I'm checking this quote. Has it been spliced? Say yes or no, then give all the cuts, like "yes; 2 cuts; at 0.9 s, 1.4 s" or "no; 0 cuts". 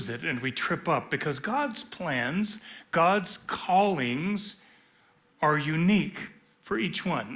yes; 1 cut; at 2.9 s